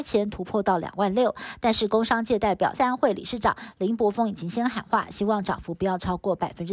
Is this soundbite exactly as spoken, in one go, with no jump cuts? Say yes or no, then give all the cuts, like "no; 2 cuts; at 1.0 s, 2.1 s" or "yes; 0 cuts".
no; 1 cut; at 2.7 s